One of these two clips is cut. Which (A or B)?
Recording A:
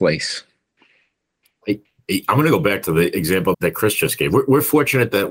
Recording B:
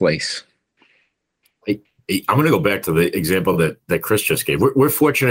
A